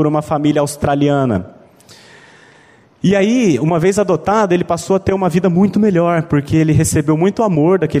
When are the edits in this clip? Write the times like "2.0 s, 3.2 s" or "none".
none